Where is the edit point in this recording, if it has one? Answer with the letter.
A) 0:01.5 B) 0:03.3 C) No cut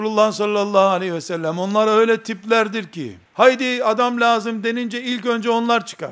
B